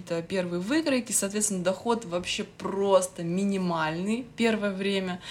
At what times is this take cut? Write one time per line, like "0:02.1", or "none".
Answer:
none

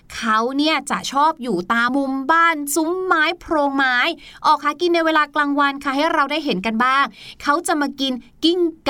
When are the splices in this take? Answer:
0:01.9

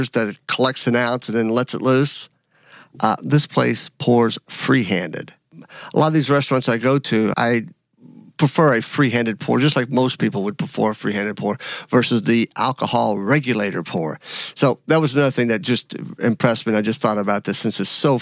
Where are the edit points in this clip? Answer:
0:07.3

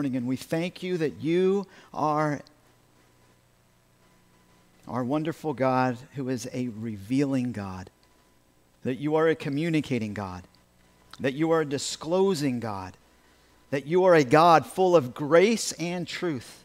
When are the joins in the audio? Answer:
none

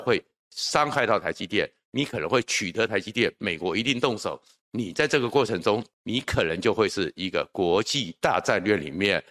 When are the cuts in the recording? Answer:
0:04.6
0:05.9

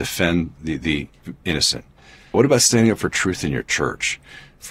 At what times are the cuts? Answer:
0:02.3

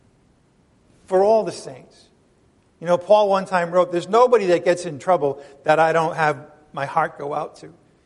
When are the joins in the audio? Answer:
none

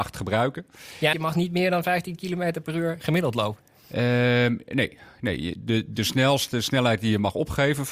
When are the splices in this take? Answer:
0:01.1

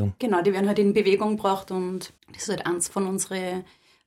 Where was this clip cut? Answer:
0:02.2

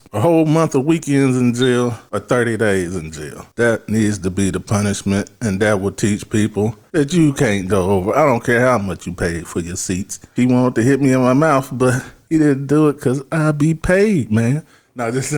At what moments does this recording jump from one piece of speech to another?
0:07.7
0:10.4

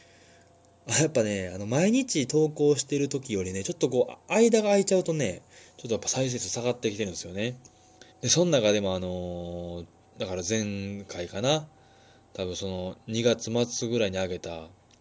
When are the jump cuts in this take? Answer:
0:08.1

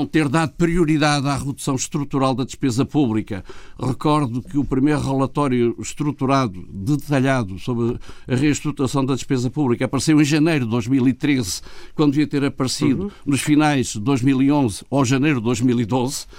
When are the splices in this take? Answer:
none

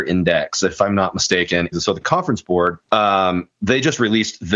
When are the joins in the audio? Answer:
0:01.7
0:02.8

